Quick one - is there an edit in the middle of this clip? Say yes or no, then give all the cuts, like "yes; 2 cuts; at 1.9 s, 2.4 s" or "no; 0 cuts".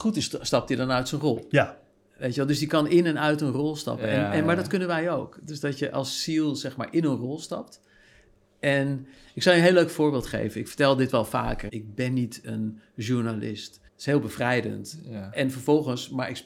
yes; 2 cuts; at 11.7 s, 13.9 s